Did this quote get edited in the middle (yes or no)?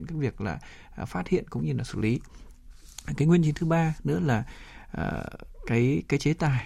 no